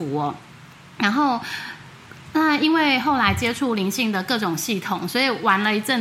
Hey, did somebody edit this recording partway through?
no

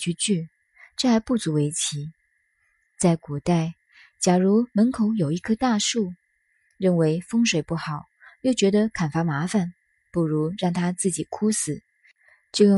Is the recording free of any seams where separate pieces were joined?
yes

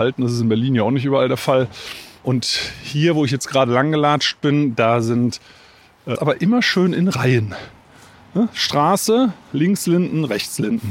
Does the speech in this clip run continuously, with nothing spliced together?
no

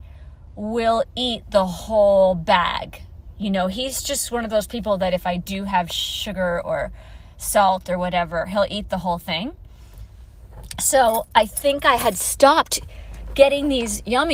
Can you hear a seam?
no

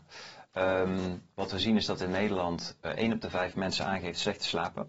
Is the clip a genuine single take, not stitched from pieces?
no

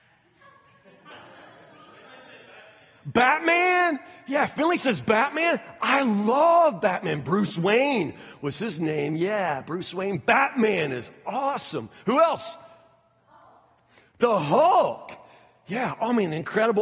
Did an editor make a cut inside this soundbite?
no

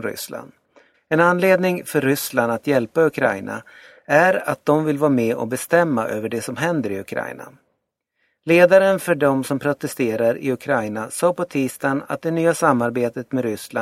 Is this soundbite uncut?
no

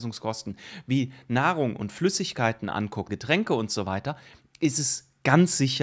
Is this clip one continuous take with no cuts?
no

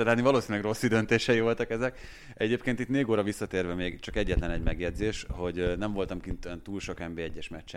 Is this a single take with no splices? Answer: yes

